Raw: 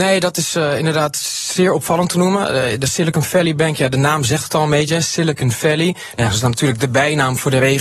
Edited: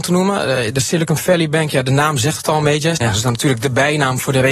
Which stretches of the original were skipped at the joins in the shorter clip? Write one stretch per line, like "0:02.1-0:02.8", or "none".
0:05.0-0:06.2